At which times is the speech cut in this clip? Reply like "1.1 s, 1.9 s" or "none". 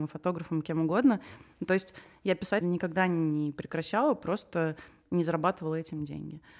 2.6 s